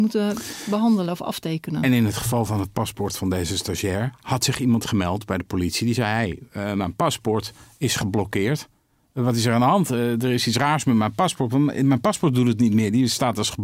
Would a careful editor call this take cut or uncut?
uncut